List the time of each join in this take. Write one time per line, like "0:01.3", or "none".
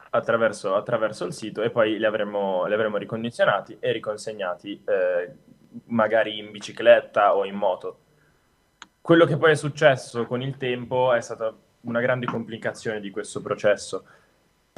none